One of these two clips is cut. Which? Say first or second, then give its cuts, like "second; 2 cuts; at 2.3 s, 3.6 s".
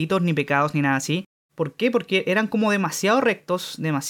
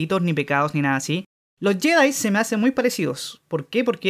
first; 1 cut; at 1.5 s